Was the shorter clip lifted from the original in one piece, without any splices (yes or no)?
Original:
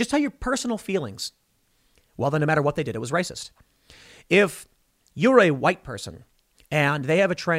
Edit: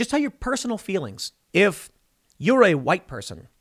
no